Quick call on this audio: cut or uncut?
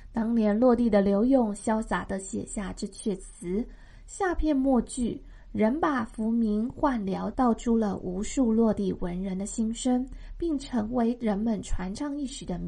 cut